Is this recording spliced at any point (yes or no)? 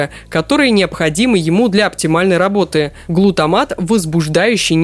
no